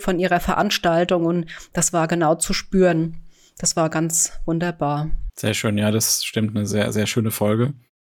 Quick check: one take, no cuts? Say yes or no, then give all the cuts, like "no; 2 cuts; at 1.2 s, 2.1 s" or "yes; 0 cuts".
no; 1 cut; at 5.3 s